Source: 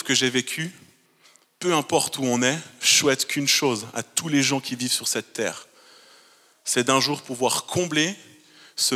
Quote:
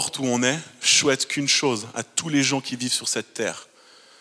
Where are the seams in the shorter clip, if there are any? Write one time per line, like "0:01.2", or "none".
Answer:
none